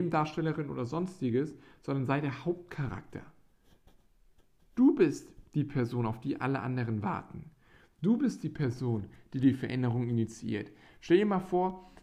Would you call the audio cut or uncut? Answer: uncut